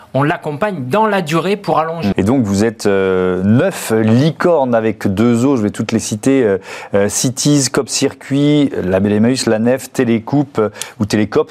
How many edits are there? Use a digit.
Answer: 1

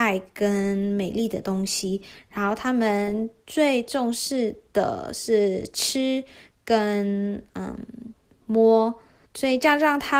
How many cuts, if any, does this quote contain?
1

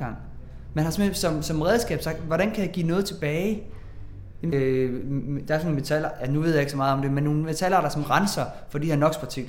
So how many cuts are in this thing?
1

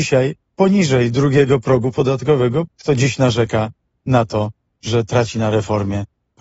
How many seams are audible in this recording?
1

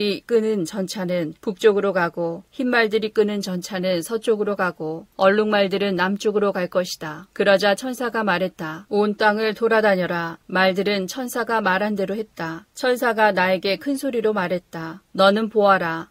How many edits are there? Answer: 1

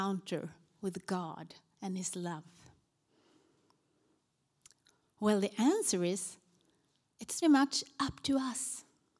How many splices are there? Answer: 1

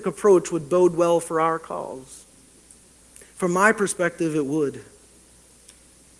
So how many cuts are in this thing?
0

